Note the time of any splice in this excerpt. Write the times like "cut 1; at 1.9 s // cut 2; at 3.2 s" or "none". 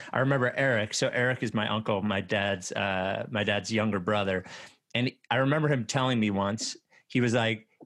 none